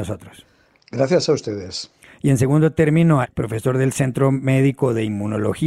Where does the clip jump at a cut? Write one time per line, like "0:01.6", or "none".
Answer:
0:02.1
0:03.2